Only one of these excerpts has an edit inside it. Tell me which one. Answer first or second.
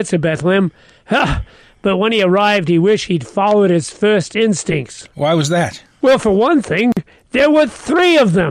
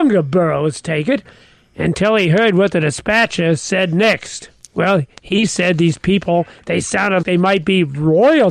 second